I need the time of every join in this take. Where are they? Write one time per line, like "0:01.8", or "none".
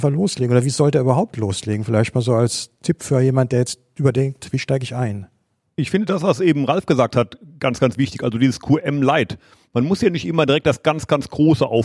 none